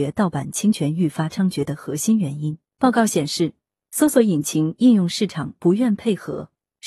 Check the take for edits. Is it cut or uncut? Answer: uncut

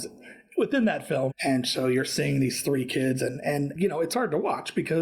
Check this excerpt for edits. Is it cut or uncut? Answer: cut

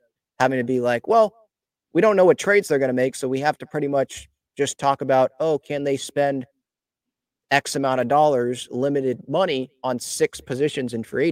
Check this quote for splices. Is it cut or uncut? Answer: uncut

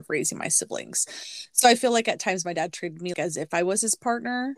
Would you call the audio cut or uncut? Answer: cut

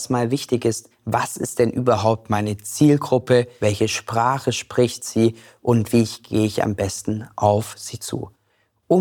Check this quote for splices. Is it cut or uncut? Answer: cut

